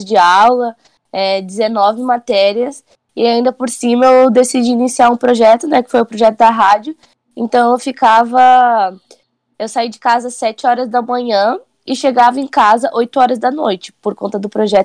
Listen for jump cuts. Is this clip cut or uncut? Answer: uncut